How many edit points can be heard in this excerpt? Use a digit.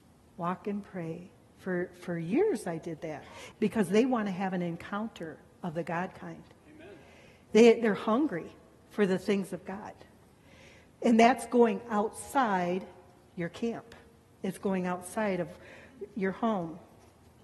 1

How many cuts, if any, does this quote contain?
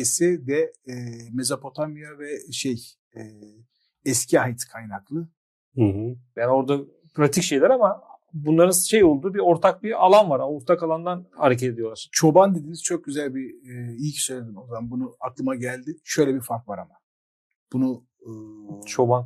1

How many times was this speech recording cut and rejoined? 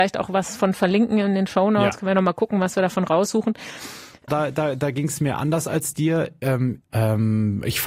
2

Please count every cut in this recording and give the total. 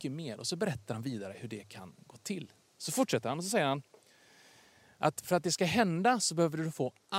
0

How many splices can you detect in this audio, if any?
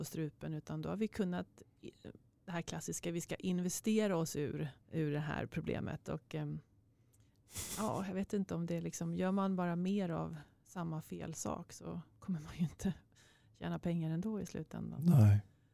1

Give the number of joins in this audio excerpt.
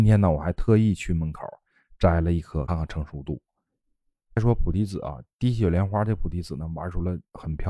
1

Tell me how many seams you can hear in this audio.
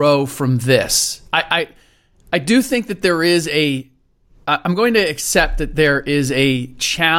0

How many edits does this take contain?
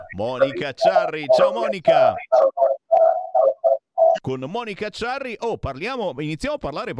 1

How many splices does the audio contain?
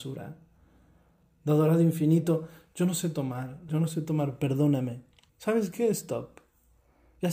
2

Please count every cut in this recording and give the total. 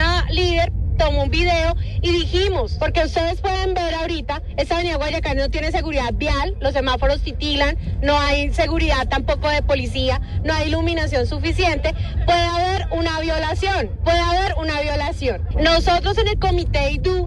2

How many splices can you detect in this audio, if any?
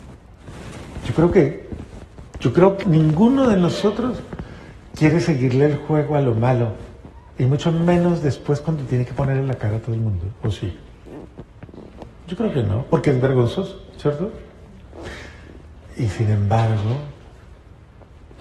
1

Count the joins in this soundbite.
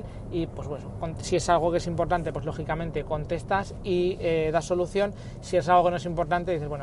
0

